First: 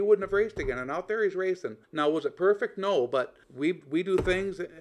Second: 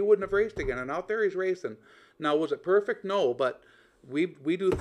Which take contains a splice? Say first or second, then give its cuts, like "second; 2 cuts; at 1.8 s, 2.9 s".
first; 2 cuts; at 1.8 s, 3.4 s